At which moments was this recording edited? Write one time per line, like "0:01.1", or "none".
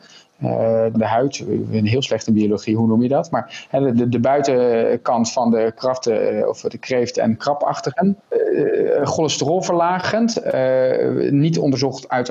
0:00.9